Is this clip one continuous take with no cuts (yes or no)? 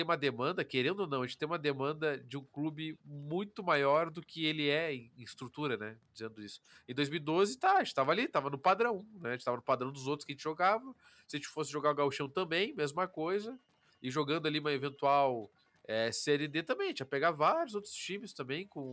yes